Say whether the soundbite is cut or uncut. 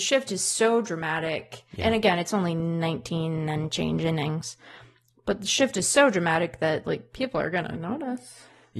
uncut